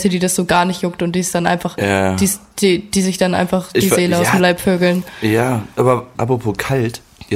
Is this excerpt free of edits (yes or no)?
yes